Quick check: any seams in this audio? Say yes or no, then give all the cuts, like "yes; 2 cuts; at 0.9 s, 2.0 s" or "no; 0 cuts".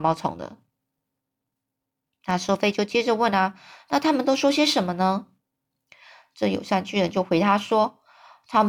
no; 0 cuts